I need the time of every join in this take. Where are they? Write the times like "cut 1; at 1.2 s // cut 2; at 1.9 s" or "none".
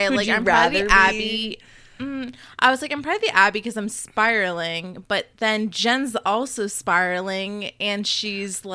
none